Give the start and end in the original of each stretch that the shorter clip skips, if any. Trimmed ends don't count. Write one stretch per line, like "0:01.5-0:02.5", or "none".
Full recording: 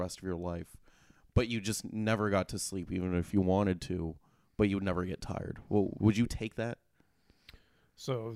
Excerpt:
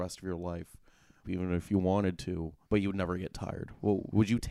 0:01.2-0:02.9
0:04.3-0:04.5